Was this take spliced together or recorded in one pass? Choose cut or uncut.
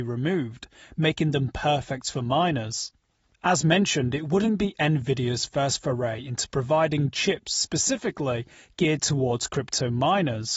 uncut